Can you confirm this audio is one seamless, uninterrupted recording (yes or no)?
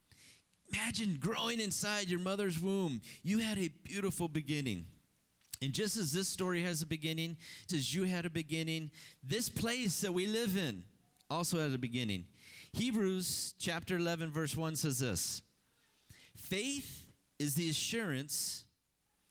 no